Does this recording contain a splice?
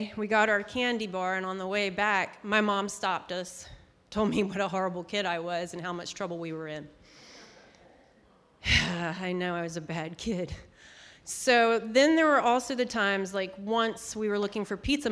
no; 0 cuts

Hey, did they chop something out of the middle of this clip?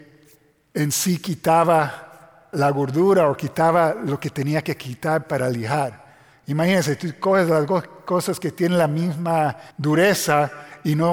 yes; 2 cuts; at 2.5 s, 9.7 s

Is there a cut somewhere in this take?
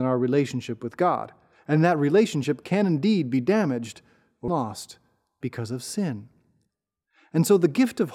yes; 1 cut; at 4.5 s

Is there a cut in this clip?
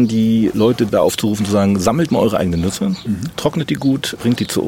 no; 0 cuts

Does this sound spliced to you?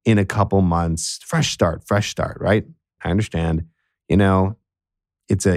yes; 1 cut; at 3.0 s

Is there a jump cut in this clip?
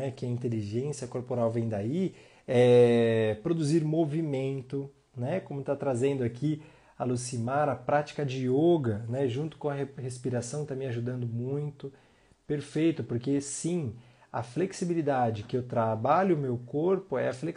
no; 0 cuts

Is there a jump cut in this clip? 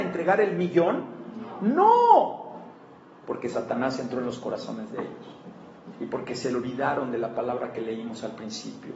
yes; 2 cuts; at 3.2 s, 5.9 s

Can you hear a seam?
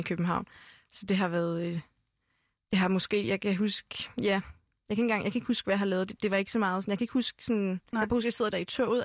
no; 0 cuts

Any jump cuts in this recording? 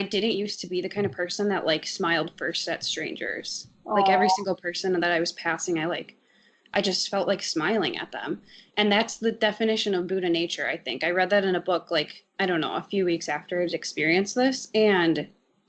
no; 0 cuts

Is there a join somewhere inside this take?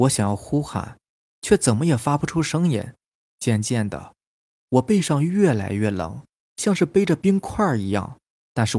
yes; 1 cut; at 3.2 s

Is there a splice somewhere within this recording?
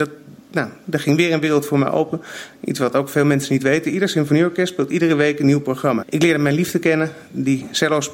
yes; 2 cuts; at 2.5 s, 6.0 s

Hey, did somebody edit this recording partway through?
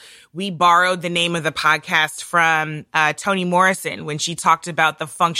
no; 0 cuts

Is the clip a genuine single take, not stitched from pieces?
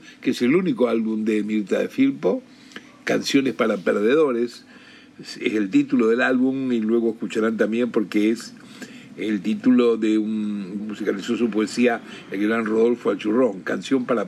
no; 1 cut; at 10.8 s

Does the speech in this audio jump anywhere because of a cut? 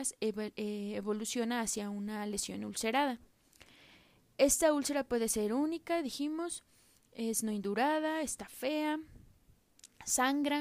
no; 0 cuts

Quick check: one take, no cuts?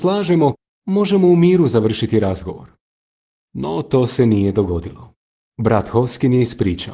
yes; 0 cuts

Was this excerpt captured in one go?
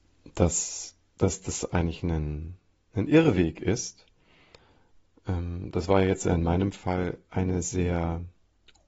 yes; 0 cuts

